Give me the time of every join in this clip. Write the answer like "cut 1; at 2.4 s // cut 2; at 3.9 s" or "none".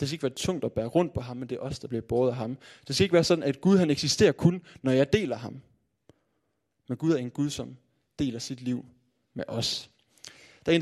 none